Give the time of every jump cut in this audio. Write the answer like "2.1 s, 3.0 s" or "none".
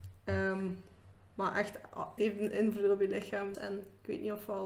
2.2 s, 3.5 s